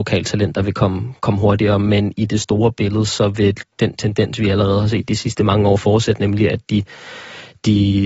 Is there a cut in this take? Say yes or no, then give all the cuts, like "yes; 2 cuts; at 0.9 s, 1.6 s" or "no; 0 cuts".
no; 0 cuts